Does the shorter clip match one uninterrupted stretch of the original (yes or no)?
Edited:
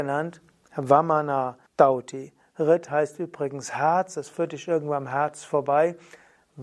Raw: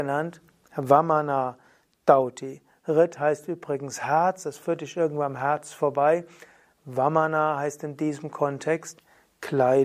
no